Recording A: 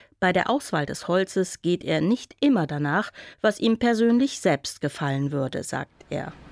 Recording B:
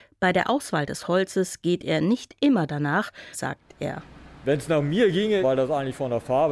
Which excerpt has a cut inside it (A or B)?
B